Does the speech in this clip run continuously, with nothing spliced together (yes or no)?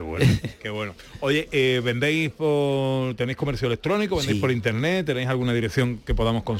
yes